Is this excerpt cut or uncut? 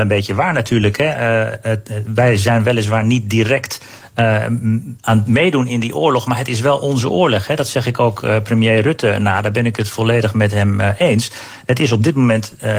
uncut